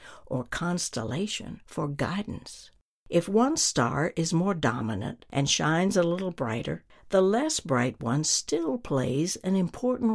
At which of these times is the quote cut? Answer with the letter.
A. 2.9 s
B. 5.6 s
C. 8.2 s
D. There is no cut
A